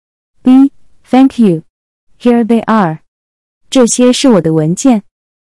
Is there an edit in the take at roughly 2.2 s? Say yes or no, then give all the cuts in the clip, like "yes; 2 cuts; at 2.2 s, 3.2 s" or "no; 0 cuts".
no; 2 cuts; at 0.9 s, 3.6 s